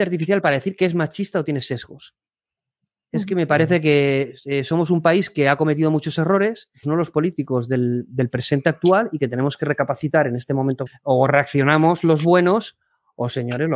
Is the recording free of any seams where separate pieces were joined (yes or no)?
no